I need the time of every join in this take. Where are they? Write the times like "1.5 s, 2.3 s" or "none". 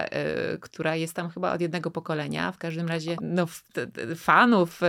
3.2 s